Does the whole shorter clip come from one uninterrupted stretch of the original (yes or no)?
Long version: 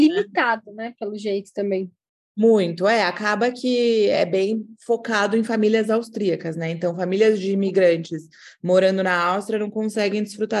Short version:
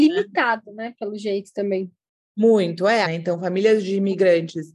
no